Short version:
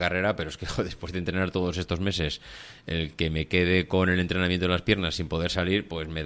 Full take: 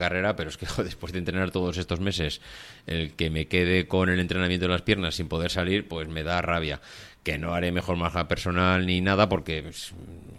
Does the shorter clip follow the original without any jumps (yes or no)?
yes